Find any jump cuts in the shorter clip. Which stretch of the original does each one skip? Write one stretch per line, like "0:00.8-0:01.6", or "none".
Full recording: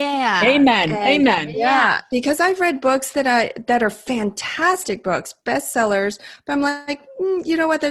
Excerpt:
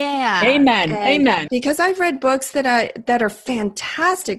0:01.5-0:02.1